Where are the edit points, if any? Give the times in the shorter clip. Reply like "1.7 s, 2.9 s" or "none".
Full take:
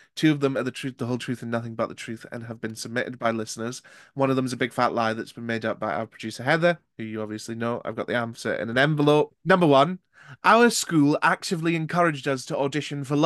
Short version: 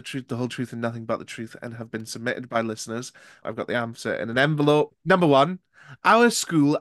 3.4 s